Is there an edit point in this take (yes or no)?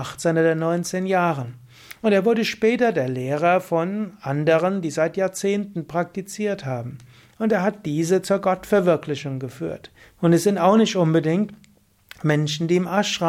yes